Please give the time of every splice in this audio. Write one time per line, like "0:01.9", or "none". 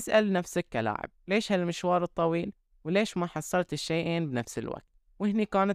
none